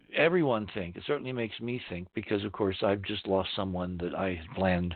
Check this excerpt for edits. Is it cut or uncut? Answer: uncut